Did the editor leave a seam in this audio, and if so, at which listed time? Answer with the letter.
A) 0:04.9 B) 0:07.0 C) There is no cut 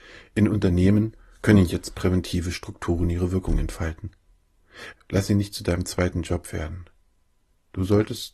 A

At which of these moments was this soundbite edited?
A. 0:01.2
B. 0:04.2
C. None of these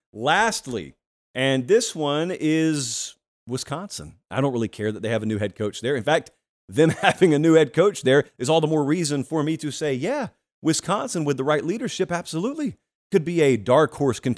A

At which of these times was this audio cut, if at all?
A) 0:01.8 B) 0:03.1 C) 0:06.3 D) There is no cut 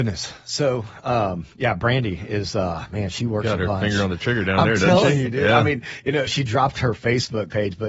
C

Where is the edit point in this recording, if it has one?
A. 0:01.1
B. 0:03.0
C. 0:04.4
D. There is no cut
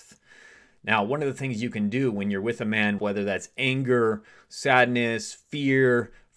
B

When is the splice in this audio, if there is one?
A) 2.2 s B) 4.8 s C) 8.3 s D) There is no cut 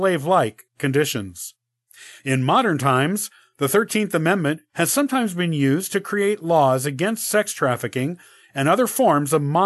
A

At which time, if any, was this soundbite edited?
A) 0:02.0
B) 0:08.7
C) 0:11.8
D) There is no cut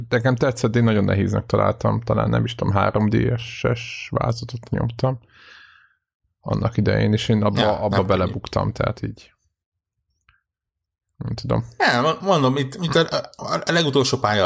D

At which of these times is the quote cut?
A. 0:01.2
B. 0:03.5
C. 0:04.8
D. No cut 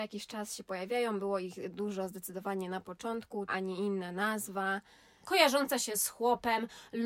B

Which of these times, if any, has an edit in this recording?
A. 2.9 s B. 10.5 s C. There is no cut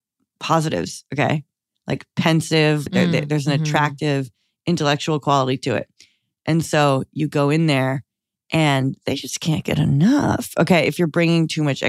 A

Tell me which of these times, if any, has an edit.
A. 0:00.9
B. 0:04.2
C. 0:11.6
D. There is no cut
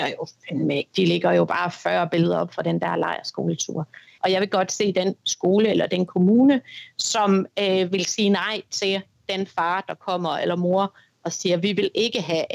B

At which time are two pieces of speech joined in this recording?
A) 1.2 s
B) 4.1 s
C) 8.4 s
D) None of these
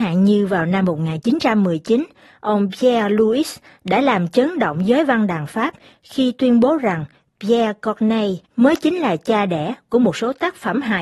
C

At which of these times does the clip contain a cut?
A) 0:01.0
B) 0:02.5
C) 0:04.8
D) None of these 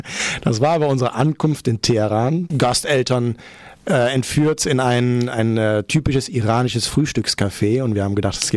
B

